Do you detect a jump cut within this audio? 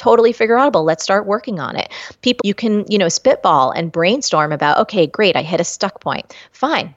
yes; 1 cut; at 2.4 s

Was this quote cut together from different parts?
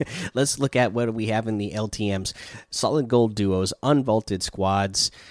no; 0 cuts

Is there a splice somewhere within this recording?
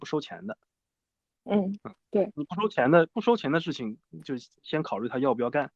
no; 0 cuts

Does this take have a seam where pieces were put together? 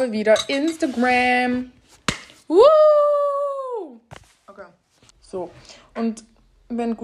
yes; 1 cut; at 5.1 s

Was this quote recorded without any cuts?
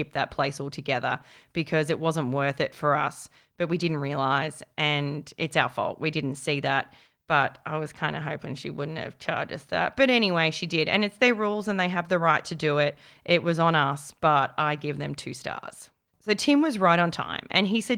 yes; 0 cuts

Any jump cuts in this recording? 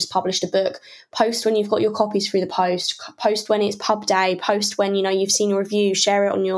no; 0 cuts

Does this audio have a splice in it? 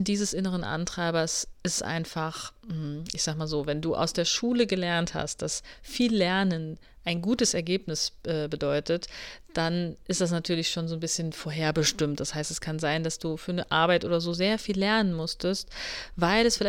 no; 0 cuts

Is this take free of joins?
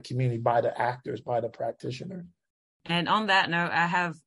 no; 1 cut; at 2.7 s

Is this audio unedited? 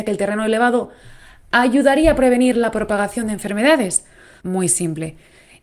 no; 1 cut; at 4.4 s

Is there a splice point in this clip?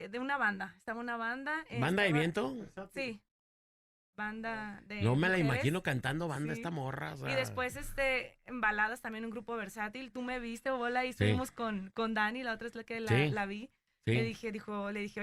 no; 0 cuts

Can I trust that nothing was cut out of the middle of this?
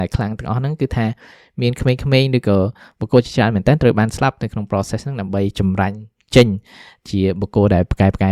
yes; 0 cuts

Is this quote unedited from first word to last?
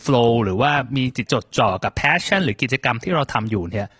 no; 1 cut; at 1.3 s

